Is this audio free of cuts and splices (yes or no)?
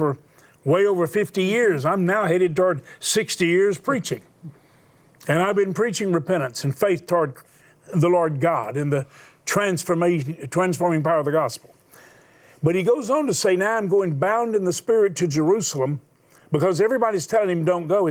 yes